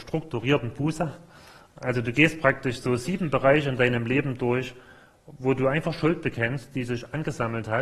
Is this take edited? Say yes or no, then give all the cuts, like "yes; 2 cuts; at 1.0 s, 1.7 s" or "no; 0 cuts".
no; 0 cuts